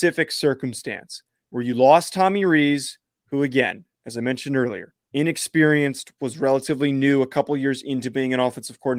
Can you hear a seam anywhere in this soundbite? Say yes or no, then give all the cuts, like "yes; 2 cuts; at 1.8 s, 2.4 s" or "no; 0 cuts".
yes; 1 cut; at 5.0 s